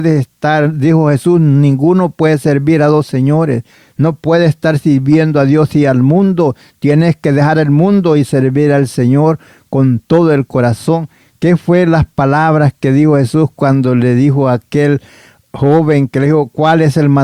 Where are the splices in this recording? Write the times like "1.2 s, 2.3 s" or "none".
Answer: none